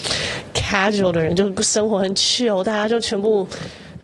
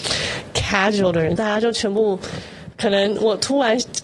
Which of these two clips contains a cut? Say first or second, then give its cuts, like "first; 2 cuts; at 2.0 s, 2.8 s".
second; 1 cut; at 1.4 s